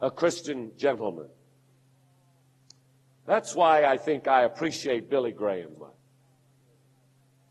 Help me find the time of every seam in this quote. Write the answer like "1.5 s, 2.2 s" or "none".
5.8 s